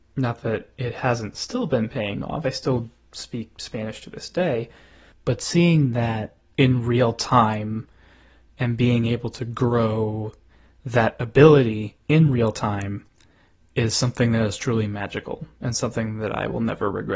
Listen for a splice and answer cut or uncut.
uncut